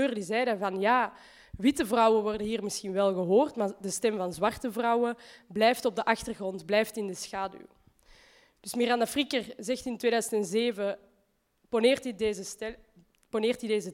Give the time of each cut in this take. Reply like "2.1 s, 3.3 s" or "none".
none